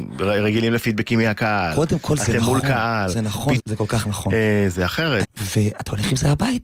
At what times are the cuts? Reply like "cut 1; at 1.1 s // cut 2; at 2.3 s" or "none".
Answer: cut 1; at 3.6 s // cut 2; at 5.2 s